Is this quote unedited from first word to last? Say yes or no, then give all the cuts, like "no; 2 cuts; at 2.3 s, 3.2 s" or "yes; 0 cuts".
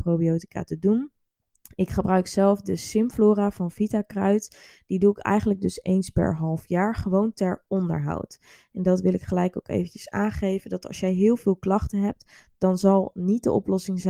yes; 0 cuts